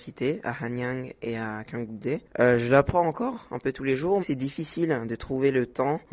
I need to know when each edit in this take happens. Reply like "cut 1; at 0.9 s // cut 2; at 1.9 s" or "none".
cut 1; at 4.2 s